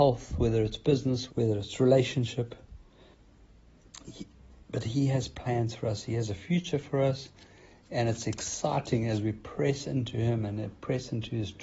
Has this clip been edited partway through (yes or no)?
yes